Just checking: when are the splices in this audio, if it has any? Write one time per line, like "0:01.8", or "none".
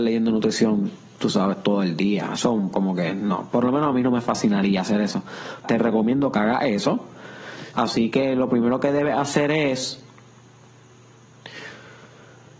0:05.6
0:07.7